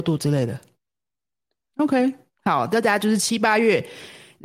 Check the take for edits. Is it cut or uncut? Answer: cut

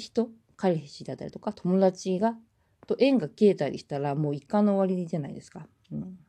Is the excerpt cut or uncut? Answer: uncut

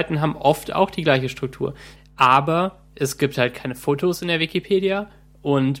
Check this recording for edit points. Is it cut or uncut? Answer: cut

